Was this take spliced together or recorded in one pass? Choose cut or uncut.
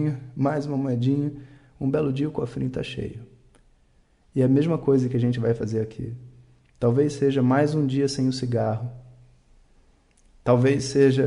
uncut